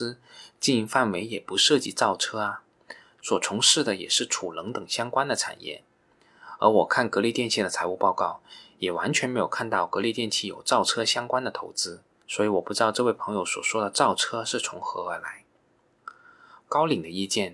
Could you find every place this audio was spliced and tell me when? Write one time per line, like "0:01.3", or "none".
0:16.6